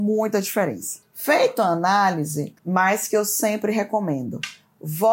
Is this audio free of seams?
no; 1 cut; at 2.6 s

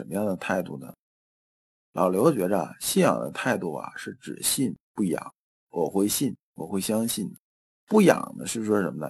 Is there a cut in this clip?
yes; 1 cut; at 5.6 s

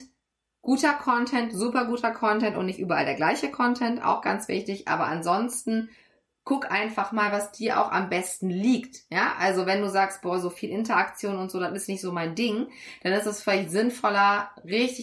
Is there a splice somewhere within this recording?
no; 0 cuts

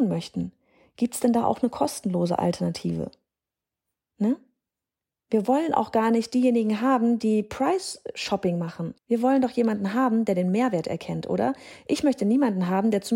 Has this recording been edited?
yes; 1 cut; at 9.0 s

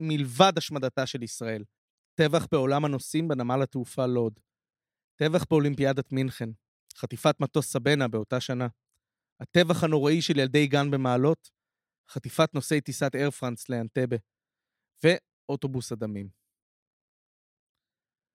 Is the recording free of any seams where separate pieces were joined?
yes; 0 cuts

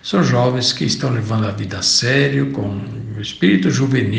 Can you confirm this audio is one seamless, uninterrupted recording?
yes; 0 cuts

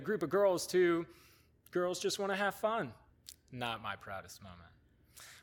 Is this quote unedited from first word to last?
yes; 0 cuts

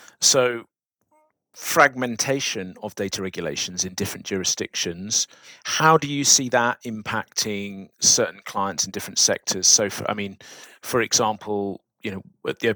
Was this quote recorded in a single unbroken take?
yes; 0 cuts

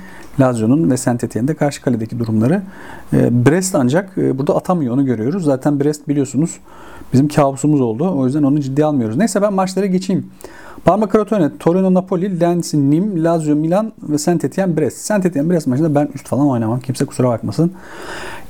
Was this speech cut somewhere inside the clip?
no; 0 cuts

